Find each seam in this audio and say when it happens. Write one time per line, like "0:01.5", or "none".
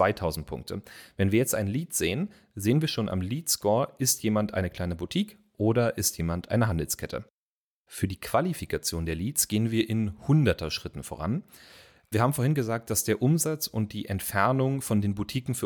none